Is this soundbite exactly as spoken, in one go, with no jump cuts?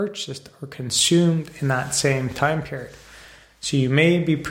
yes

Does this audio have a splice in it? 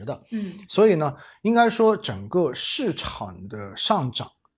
no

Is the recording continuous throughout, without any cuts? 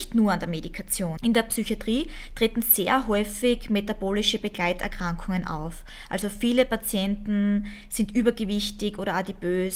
no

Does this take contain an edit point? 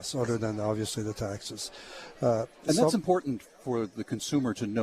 no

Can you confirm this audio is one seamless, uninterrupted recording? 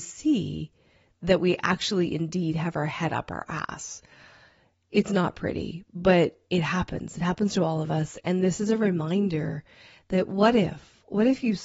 yes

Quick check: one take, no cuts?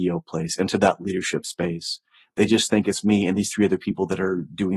yes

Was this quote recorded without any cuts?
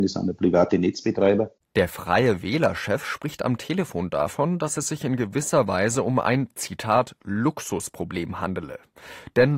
yes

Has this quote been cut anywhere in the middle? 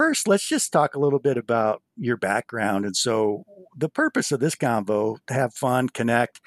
no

